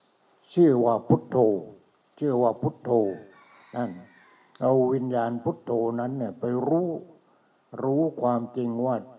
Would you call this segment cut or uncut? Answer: uncut